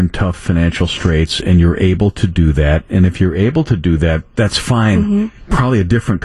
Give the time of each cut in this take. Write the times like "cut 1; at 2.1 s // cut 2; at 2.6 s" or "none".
none